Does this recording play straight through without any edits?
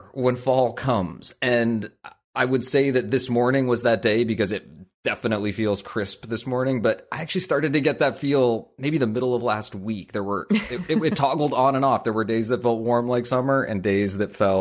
yes; 0 cuts

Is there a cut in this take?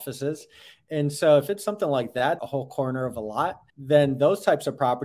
yes; 2 cuts; at 2.4 s, 3.7 s

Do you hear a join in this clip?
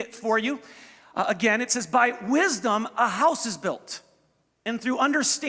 no; 0 cuts

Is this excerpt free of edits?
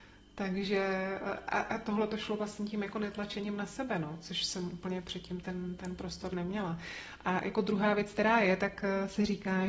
yes; 0 cuts

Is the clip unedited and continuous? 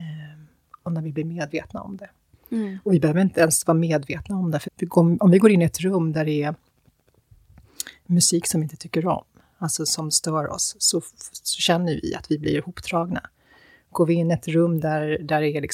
no; 1 cut; at 4.6 s

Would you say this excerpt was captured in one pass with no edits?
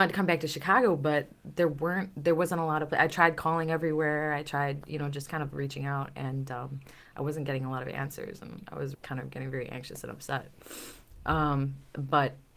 no; 1 cut; at 8.9 s

